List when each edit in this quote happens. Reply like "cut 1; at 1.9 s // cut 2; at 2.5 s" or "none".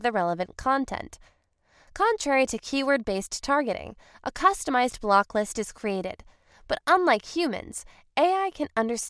none